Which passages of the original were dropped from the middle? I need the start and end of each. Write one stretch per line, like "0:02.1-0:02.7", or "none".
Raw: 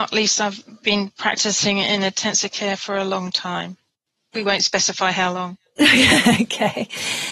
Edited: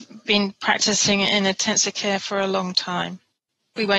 none

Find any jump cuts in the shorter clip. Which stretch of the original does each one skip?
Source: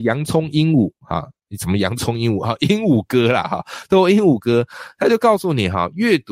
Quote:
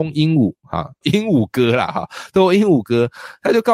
0:01.4-0:02.6

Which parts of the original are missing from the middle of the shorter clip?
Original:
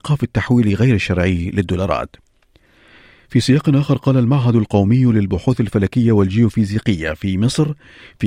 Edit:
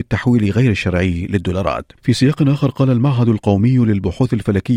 0:02.2-0:03.2

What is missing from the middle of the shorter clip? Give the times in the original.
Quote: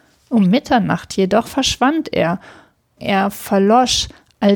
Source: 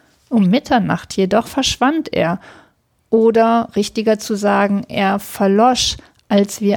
0:03.0-0:04.9

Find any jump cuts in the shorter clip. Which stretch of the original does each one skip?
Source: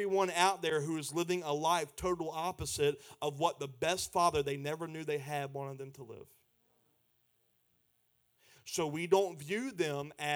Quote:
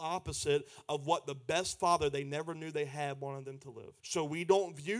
0:06.3-0:08.6

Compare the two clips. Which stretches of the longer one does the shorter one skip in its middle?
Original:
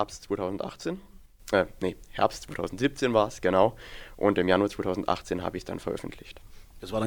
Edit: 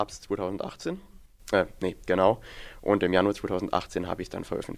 0:02.0-0:03.4

